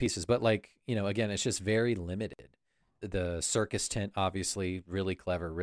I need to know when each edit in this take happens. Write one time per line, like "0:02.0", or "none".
0:03.0